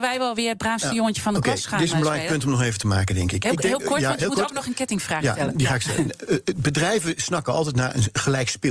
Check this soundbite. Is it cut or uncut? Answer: uncut